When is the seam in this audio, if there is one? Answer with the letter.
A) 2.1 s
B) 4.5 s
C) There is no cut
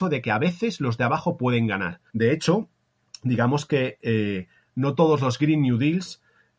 A